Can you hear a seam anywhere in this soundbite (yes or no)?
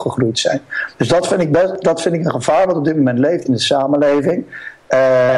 no